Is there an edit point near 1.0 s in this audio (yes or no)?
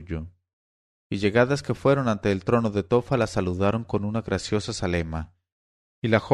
yes